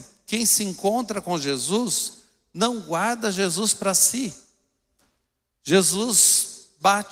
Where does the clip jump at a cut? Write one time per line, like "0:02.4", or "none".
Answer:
none